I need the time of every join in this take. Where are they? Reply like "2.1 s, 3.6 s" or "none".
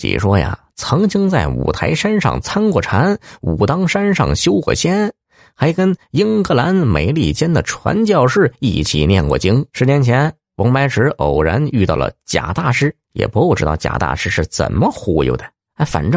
9.7 s, 13.0 s